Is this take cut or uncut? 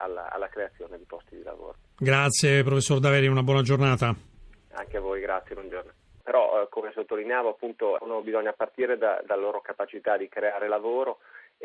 cut